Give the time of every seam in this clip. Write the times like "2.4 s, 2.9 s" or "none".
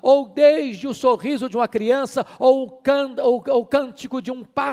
none